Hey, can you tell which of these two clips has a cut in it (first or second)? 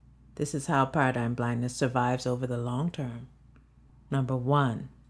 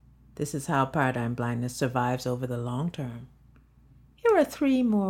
first